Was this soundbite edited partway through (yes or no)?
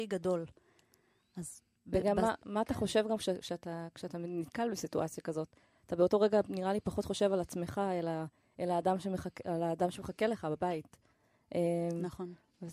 no